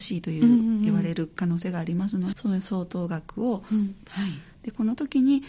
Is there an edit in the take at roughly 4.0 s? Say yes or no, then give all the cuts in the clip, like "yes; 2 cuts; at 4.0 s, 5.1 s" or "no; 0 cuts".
yes; 2 cuts; at 2.3 s, 4.0 s